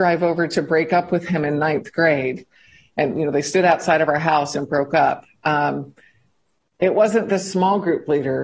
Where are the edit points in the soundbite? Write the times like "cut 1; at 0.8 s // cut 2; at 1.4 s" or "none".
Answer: none